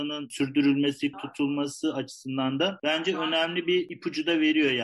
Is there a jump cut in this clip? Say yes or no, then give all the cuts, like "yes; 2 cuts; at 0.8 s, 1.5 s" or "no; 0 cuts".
yes; 1 cut; at 1.1 s